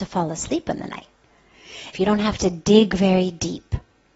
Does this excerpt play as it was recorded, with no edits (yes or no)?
no